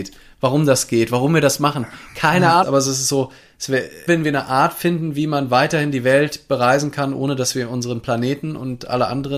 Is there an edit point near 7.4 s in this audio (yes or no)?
no